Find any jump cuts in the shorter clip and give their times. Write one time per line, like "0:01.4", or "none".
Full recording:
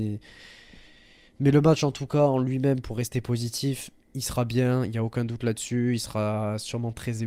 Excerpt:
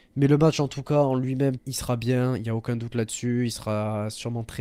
0:01.6